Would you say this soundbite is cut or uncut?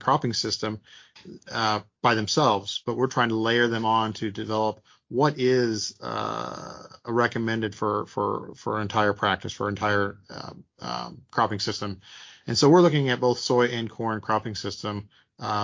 uncut